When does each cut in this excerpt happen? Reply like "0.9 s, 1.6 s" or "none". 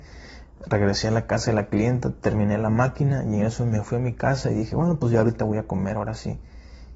none